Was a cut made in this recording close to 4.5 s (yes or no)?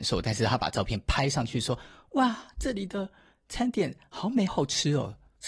yes